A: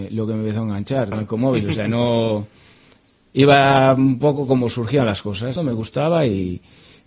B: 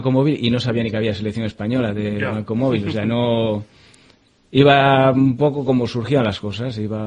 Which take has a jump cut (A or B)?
A